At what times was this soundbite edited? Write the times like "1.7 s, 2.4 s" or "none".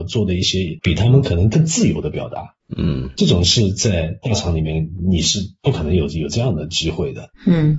none